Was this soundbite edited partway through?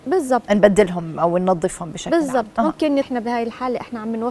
yes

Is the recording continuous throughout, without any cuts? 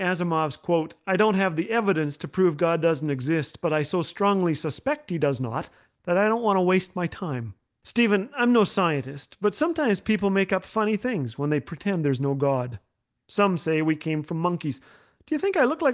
yes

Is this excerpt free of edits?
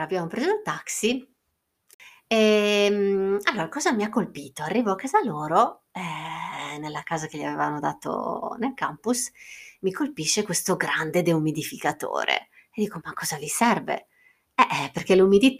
yes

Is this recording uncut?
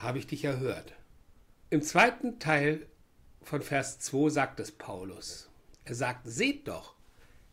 no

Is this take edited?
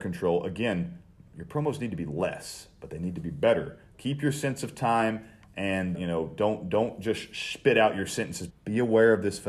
yes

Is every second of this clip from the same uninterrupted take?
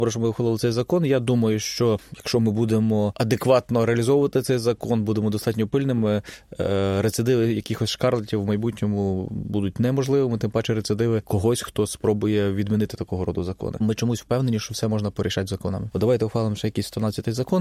no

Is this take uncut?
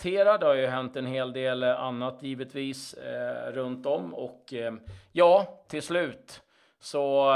yes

